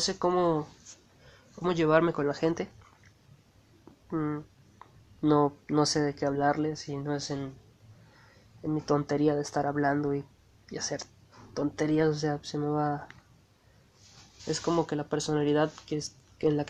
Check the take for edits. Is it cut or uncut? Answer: cut